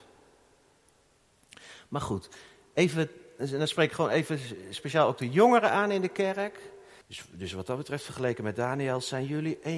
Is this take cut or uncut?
cut